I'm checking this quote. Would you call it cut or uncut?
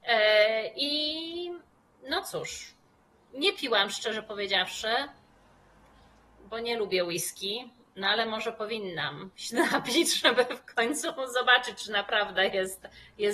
uncut